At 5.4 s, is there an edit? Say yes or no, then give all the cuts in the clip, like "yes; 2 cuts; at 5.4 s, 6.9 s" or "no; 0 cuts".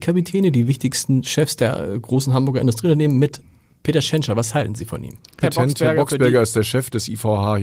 yes; 1 cut; at 5.4 s